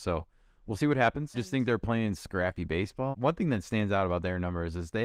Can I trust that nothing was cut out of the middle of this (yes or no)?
no